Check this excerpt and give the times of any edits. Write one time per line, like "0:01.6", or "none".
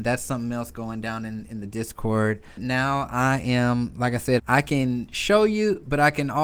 0:02.6
0:04.4